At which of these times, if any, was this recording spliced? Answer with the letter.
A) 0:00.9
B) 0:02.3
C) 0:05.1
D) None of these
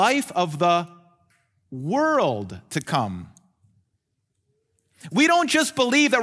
D